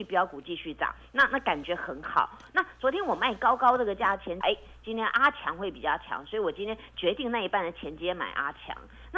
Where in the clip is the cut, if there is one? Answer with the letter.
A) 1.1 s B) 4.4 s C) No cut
B